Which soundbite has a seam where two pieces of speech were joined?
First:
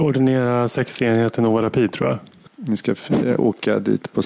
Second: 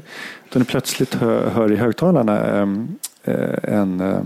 first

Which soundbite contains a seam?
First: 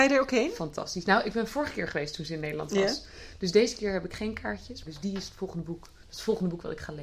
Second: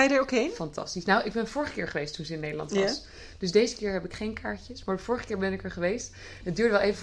first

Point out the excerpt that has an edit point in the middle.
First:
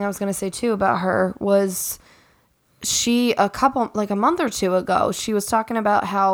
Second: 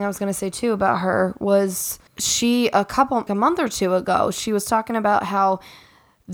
second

